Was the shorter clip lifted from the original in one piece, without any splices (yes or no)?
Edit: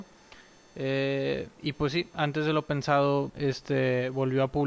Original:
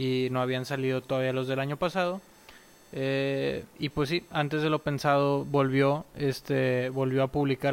no